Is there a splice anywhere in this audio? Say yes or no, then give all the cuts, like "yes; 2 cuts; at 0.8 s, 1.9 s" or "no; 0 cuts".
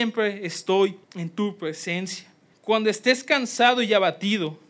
yes; 2 cuts; at 1.0 s, 2.5 s